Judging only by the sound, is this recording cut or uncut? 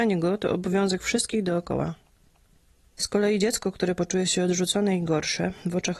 uncut